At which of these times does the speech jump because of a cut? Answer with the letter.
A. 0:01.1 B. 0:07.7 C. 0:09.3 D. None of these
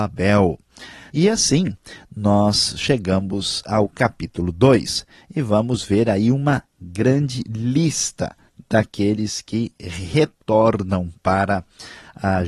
A